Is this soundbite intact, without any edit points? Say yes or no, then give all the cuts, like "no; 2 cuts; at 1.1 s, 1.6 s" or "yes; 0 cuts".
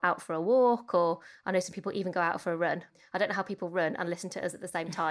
yes; 0 cuts